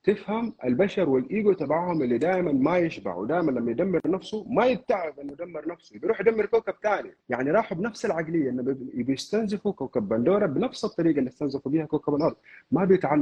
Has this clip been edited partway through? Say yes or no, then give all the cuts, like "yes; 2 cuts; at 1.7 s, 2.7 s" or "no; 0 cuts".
yes; 1 cut; at 7.2 s